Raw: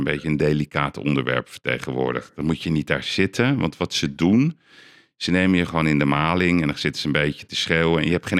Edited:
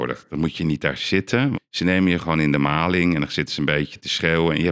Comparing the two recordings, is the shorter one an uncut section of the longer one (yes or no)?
no